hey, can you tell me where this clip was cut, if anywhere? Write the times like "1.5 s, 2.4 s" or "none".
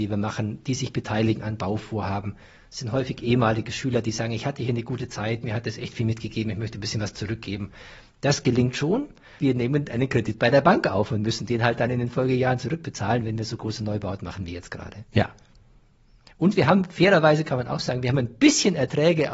9.4 s